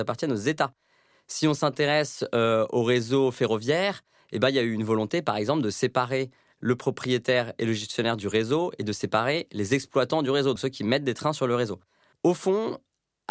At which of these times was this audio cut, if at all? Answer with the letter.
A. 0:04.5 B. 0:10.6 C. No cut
B